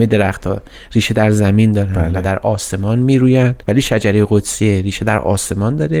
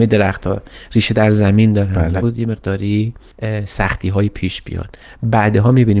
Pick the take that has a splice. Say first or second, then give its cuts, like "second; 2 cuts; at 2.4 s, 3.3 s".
second; 1 cut; at 2.2 s